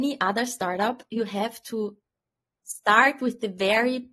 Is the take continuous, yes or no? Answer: yes